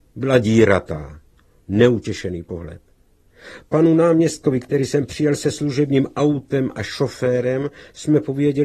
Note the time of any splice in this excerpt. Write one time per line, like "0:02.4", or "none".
0:01.6